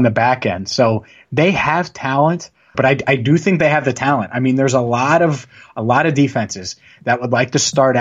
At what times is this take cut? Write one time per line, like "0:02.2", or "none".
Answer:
0:02.7

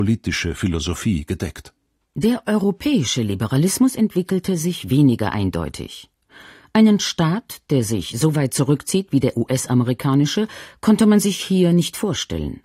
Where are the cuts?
none

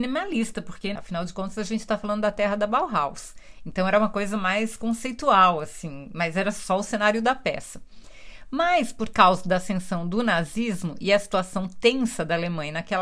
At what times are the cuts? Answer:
0:01.0

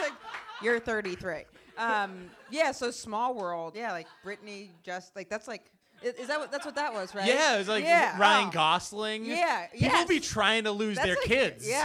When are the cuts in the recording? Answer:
0:03.7

